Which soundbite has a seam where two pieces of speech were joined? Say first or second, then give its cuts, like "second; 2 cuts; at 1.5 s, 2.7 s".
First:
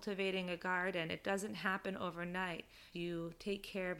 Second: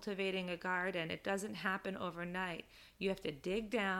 first; 1 cut; at 2.9 s